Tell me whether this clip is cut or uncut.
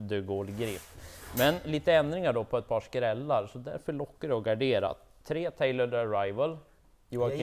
uncut